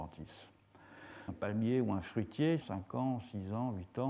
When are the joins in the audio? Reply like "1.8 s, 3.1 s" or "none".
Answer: 1.3 s, 2.6 s